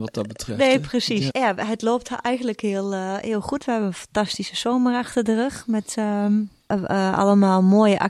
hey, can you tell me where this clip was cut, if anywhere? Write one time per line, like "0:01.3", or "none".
0:01.3

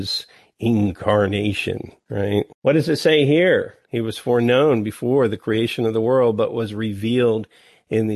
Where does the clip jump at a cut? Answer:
0:02.5
0:03.8

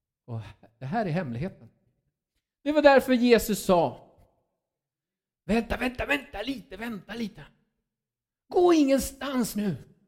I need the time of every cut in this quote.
none

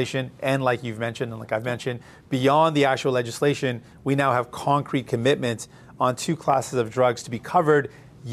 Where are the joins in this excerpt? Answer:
none

